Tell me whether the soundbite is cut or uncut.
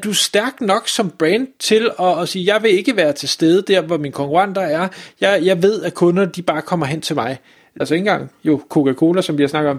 cut